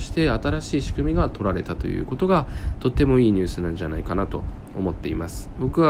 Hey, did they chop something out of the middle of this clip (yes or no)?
no